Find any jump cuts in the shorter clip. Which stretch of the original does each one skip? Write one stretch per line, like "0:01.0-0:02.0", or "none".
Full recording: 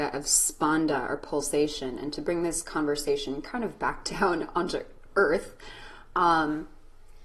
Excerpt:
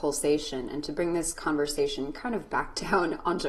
none